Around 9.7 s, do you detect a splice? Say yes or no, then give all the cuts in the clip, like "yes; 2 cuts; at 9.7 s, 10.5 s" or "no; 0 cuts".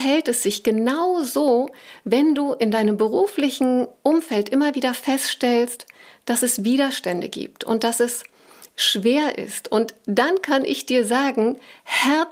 no; 0 cuts